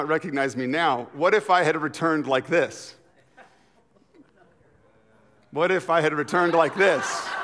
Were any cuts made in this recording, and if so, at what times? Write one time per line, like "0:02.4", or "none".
none

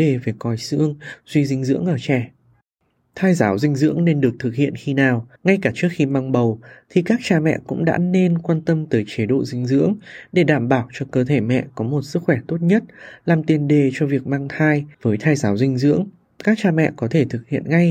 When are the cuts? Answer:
0:05.4
0:14.9

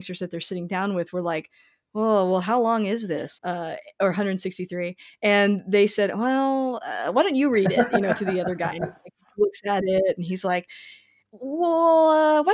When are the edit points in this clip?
0:03.4

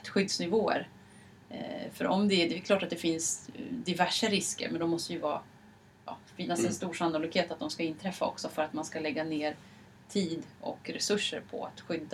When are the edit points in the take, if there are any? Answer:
none

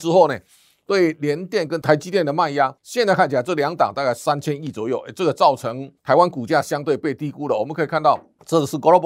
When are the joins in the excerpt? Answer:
0:02.8
0:06.0

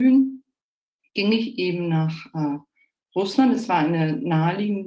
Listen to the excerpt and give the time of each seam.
none

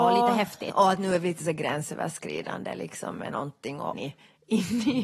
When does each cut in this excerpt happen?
0:03.9

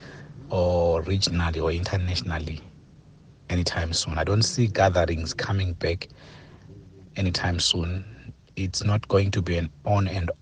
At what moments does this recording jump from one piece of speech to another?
none

